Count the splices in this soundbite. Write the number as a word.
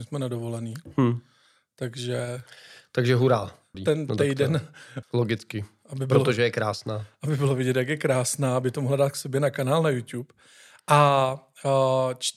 two